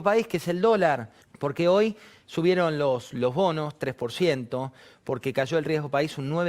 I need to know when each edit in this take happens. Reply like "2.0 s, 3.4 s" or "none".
1.2 s